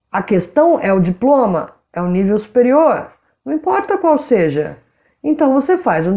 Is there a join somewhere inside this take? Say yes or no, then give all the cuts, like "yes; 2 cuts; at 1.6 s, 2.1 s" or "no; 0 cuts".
no; 0 cuts